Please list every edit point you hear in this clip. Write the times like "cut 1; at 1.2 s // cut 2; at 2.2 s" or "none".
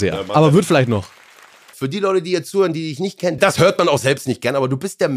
cut 1; at 1.7 s // cut 2; at 3.4 s